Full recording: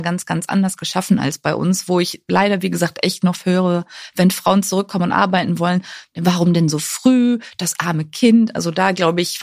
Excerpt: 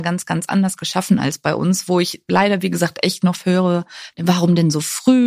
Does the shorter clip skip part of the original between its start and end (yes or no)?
yes